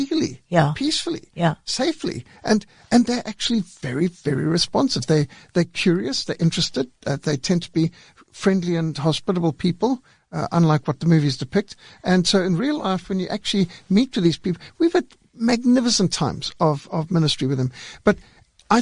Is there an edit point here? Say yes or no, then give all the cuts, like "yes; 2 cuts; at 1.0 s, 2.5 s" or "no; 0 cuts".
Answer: no; 0 cuts